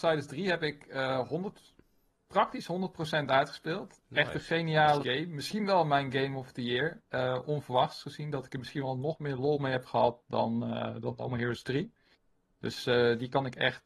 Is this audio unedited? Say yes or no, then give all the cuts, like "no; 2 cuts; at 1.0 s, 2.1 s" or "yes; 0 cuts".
no; 1 cut; at 5.0 s